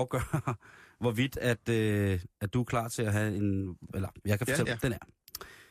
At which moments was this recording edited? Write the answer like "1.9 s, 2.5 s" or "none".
4.6 s